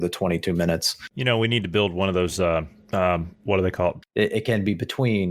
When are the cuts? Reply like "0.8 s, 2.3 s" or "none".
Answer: 1.1 s, 4.0 s